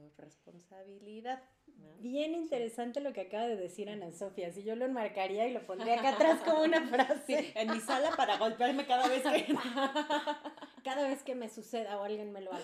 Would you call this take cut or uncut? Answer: uncut